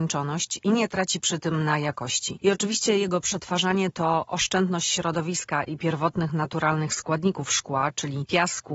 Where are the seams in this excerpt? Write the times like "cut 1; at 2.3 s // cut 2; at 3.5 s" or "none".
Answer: none